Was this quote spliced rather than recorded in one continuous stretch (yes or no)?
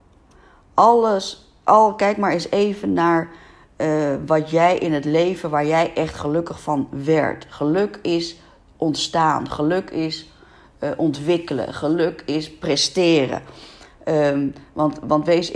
no